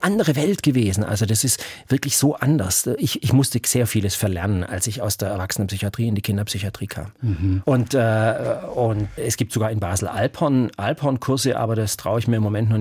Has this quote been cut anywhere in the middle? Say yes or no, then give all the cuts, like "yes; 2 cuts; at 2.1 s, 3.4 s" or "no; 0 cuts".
yes; 2 cuts; at 7.6 s, 9.2 s